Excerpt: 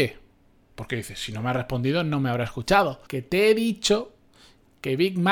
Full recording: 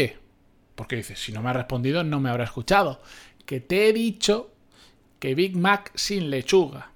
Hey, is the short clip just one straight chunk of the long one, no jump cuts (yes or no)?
no